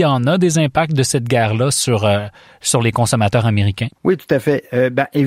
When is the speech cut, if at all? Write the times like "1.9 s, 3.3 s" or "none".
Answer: 4.0 s